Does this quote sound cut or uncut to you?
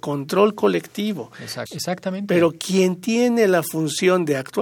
cut